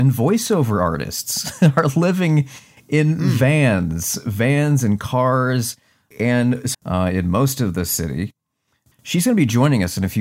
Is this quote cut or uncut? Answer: cut